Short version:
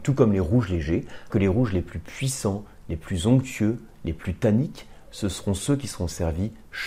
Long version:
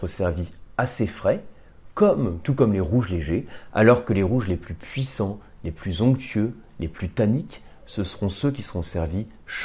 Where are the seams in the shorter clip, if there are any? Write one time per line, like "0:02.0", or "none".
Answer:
0:01.3